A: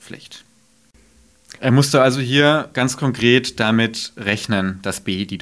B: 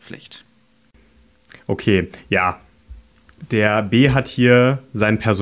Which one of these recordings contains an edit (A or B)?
A